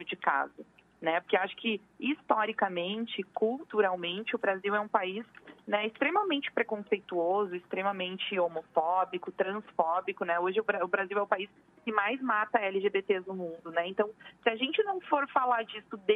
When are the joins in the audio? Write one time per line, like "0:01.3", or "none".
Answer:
none

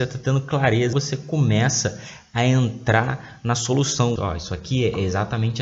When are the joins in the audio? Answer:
0:00.9
0:04.2

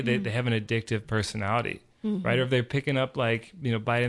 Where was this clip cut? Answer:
none

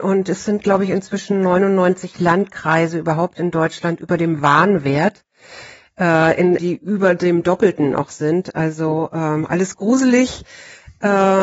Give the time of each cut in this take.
0:06.6

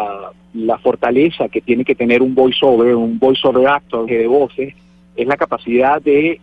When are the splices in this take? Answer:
0:04.1

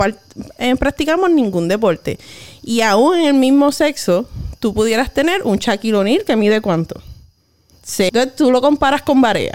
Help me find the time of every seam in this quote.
0:08.1

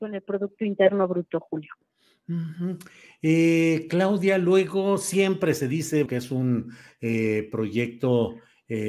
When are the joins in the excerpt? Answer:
0:06.1

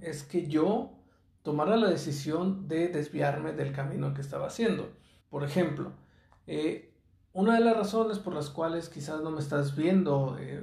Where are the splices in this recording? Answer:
0:05.2

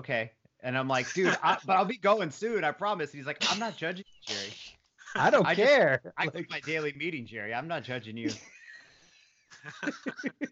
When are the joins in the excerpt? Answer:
none

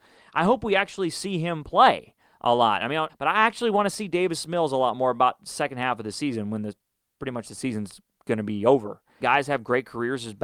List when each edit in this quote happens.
0:03.1
0:09.2

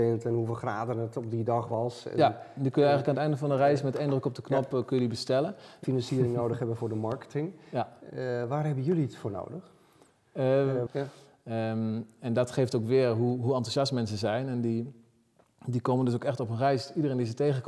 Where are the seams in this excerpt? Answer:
0:05.8
0:10.9

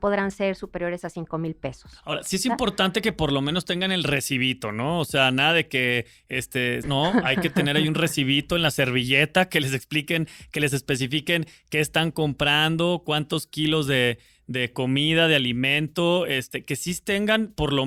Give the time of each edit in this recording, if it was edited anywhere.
0:06.8

